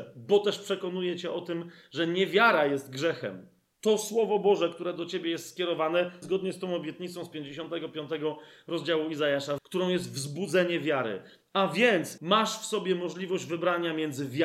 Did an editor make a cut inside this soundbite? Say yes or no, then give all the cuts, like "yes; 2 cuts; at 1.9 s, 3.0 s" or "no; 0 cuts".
yes; 3 cuts; at 6.2 s, 9.6 s, 12.2 s